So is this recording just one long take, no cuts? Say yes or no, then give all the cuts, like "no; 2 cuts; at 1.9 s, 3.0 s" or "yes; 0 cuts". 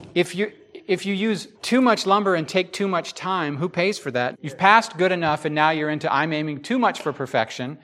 no; 2 cuts; at 1.5 s, 4.3 s